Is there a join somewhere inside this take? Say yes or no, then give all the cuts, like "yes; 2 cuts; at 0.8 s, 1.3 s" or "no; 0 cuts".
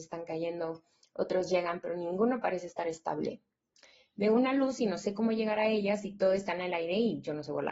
no; 0 cuts